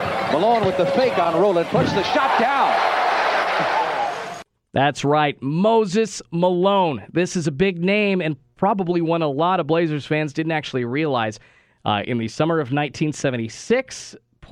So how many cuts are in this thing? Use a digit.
1